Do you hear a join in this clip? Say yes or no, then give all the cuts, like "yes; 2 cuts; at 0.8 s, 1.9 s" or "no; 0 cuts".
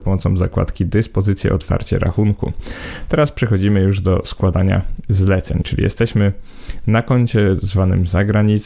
yes; 1 cut; at 5.6 s